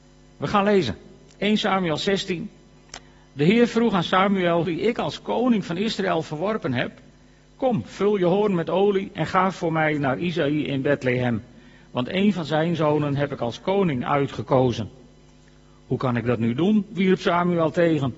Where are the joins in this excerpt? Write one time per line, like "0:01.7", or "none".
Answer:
0:04.6